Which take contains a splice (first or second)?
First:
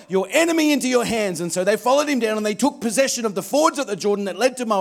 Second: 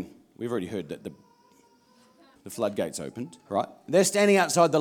second